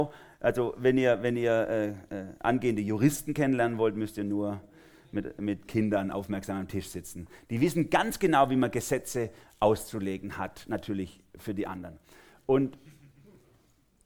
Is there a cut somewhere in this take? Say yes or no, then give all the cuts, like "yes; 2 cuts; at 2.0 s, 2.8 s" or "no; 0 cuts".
no; 0 cuts